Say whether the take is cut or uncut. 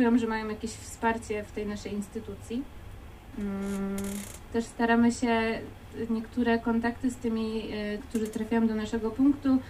cut